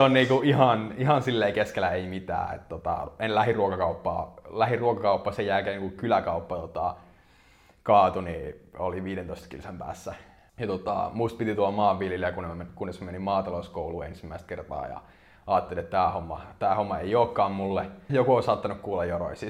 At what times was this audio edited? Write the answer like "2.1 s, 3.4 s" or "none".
10.5 s, 18.1 s

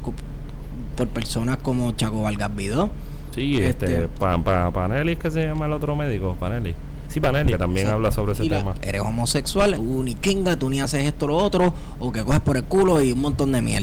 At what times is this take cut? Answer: 7.5 s, 8.7 s, 9.7 s

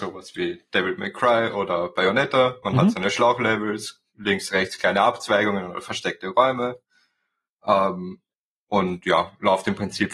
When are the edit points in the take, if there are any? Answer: none

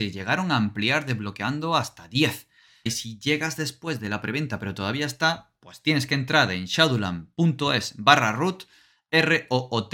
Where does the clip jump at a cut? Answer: 2.9 s

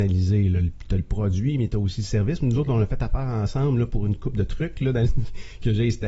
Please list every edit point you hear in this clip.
none

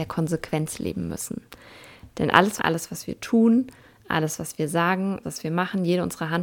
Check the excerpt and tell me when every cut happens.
2.6 s, 5.2 s

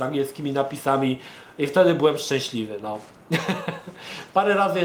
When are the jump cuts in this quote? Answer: none

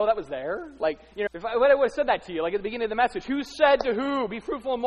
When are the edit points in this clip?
1.3 s

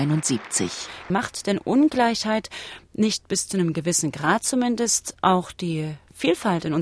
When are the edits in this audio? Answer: 1.1 s

